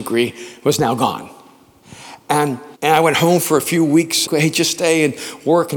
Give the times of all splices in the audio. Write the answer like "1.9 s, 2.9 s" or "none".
2.7 s, 4.3 s

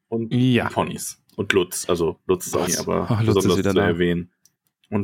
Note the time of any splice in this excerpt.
2.7 s

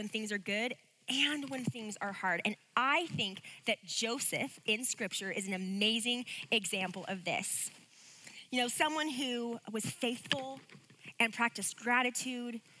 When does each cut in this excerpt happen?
none

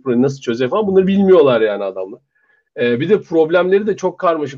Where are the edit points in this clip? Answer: none

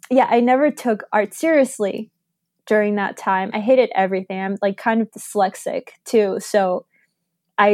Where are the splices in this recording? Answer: 3.5 s

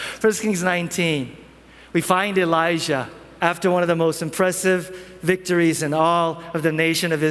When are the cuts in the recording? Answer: 3.4 s

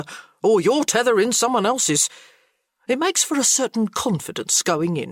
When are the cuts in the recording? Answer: 2.7 s

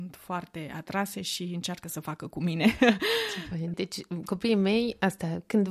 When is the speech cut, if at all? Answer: 3.7 s

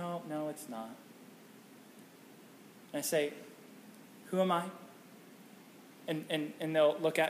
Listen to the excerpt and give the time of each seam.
none

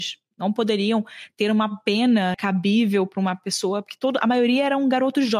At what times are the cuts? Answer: 2.3 s

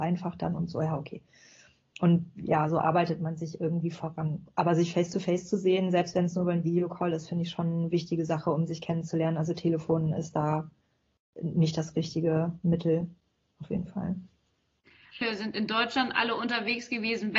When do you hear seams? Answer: 15.2 s

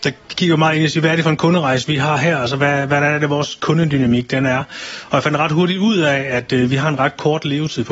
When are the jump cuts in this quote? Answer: none

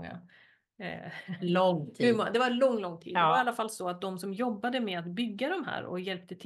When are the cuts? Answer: none

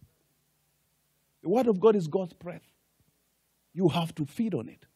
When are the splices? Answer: none

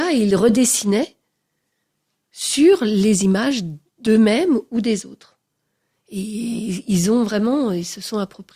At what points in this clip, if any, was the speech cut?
none

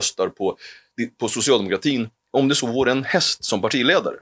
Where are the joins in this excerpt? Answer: none

